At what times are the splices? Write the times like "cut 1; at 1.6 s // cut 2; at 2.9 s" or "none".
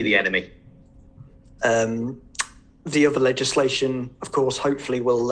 cut 1; at 1.6 s